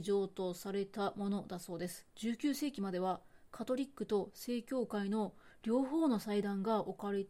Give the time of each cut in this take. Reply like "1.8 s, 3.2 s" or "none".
2.1 s

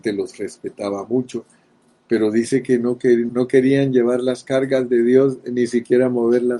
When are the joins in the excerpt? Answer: 3.3 s

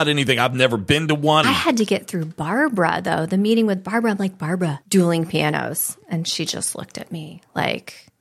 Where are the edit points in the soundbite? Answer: 1.4 s, 4.8 s

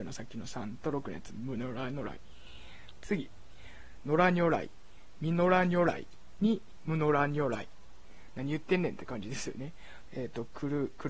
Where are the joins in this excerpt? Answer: 3.0 s, 4.0 s, 10.1 s

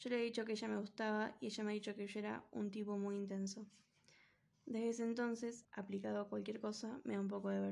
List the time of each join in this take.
5.6 s

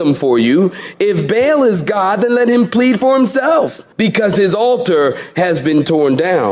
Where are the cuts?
3.9 s

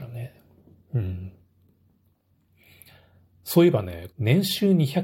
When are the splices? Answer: 4.1 s

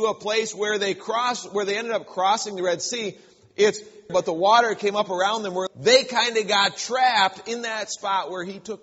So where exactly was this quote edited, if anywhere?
4.1 s, 5.7 s

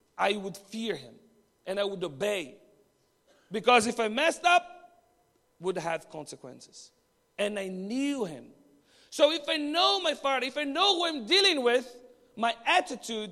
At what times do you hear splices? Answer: none

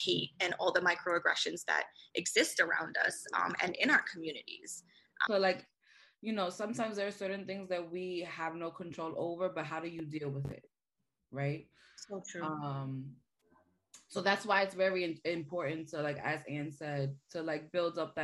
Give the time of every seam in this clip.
5.3 s

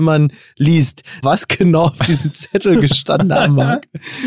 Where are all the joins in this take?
1.2 s

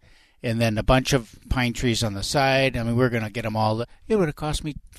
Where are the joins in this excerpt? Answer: none

